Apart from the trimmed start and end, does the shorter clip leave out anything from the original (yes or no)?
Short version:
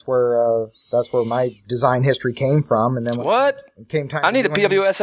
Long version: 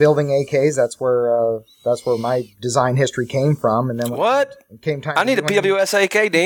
no